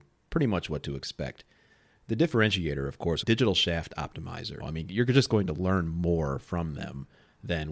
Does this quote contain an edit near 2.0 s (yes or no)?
no